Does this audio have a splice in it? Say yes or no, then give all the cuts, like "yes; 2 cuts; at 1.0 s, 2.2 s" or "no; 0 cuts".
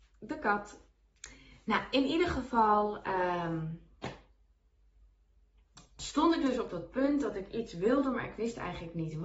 no; 0 cuts